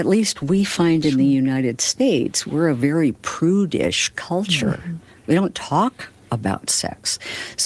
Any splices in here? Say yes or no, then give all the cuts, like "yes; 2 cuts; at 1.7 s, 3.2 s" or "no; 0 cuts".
no; 0 cuts